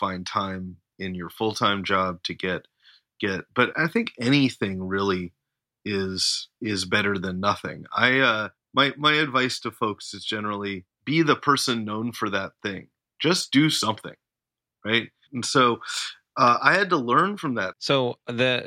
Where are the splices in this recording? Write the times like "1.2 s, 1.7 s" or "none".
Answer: 3.7 s, 15.3 s, 17.7 s